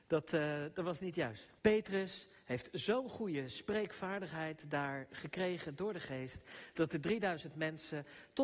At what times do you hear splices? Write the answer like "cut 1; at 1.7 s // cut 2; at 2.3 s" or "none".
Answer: cut 1; at 1.6 s